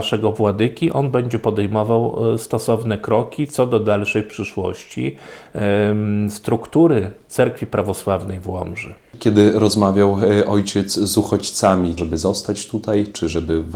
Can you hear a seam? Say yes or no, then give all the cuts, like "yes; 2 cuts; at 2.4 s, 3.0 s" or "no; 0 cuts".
yes; 1 cut; at 12.0 s